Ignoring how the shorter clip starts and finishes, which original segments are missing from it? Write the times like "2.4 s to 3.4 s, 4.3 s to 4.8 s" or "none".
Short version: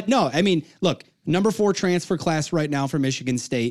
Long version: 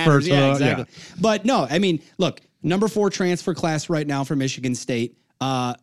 none